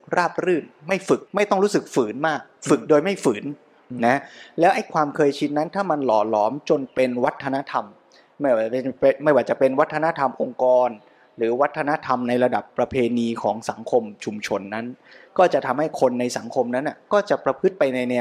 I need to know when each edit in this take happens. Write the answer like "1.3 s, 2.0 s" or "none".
1.3 s